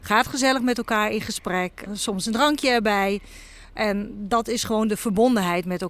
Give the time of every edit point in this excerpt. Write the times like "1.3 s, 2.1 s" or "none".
1.9 s